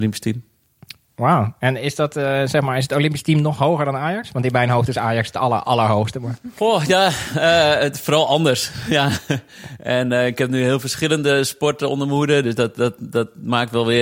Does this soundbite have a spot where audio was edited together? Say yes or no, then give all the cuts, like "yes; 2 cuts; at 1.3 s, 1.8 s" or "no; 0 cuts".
no; 0 cuts